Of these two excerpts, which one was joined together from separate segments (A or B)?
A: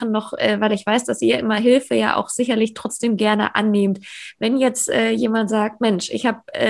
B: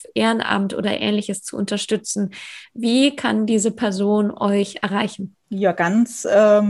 B